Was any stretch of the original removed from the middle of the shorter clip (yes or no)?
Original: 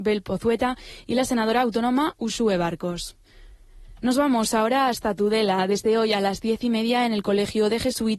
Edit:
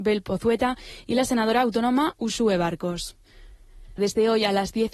yes